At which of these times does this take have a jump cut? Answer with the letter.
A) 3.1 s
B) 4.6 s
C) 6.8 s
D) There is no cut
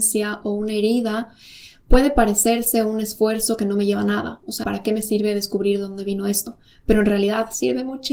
B